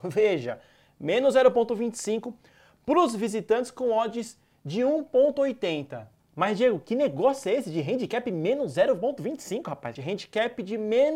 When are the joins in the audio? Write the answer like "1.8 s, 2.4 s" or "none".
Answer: 10.0 s